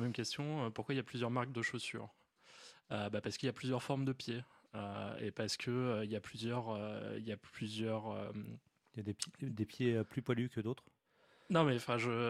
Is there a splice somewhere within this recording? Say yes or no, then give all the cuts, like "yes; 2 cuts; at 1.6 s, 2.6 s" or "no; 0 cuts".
no; 0 cuts